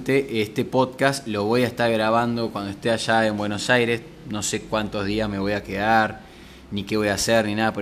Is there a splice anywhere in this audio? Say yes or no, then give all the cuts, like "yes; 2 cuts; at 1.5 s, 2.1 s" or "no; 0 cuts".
no; 0 cuts